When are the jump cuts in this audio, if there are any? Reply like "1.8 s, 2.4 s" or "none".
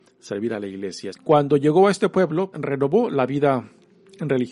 1.1 s, 2.5 s